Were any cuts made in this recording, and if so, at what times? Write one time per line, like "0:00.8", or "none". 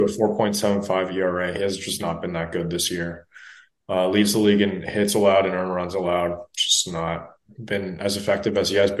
none